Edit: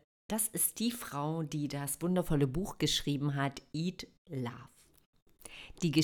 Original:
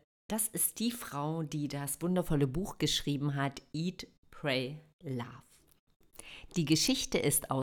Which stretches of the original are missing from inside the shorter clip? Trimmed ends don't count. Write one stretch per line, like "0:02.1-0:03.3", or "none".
0:04.2-0:04.9